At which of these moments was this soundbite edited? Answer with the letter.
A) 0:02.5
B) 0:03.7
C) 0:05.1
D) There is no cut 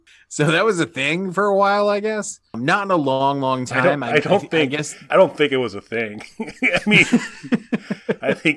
C